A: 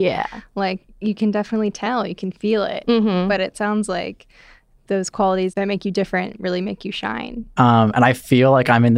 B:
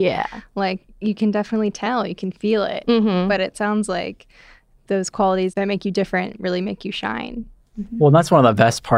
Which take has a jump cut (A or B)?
A